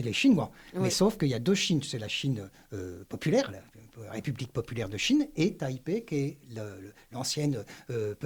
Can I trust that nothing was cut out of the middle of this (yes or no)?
yes